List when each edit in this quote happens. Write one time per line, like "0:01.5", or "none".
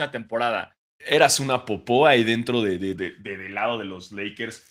0:01.0
0:03.0